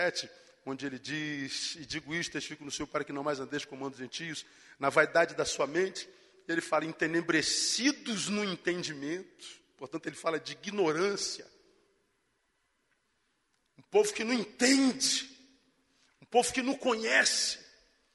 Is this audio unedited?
yes; 0 cuts

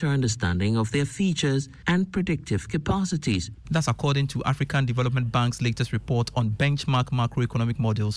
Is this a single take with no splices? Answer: no; 1 cut; at 3.6 s

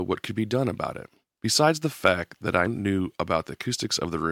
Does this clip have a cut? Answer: yes; 2 cuts; at 1.4 s, 2.7 s

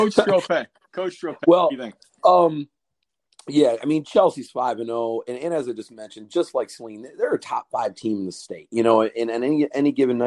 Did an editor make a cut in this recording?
no; 0 cuts

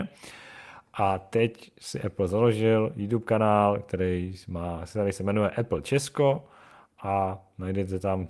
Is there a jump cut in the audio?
no; 0 cuts

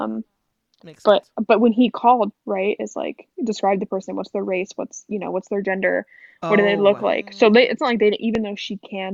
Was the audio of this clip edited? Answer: yes; 1 cut; at 2.3 s

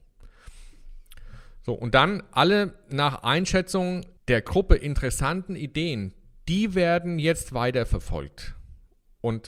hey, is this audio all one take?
no; 1 cut; at 4.2 s

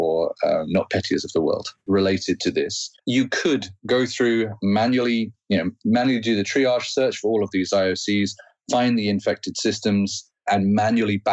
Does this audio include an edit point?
yes; 2 cuts; at 1.9 s, 3.0 s

